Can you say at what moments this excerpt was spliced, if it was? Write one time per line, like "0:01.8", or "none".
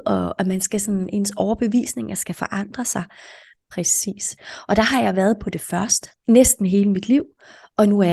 0:03.6
0:06.2